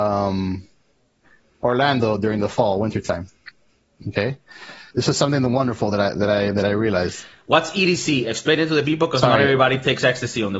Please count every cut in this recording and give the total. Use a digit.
1